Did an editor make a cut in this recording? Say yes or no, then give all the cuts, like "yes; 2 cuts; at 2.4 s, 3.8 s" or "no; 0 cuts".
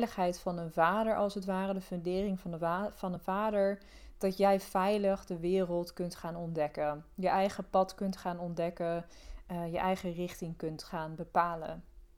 no; 0 cuts